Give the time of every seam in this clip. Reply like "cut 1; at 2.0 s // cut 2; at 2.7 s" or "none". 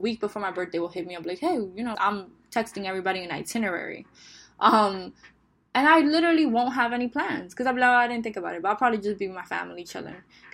cut 1; at 1.9 s